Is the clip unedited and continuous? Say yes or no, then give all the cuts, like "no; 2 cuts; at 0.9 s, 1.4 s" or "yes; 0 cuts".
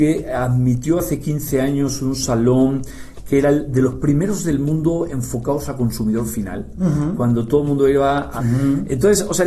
no; 1 cut; at 8.4 s